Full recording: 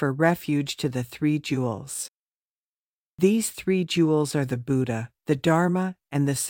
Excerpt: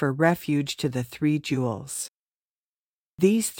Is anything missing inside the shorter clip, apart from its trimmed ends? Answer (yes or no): no